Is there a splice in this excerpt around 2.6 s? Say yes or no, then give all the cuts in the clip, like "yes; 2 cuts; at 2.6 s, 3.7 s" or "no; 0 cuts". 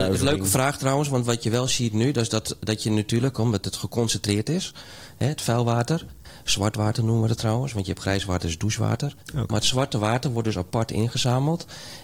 no; 0 cuts